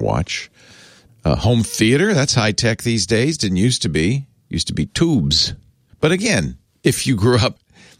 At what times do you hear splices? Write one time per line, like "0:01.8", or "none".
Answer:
none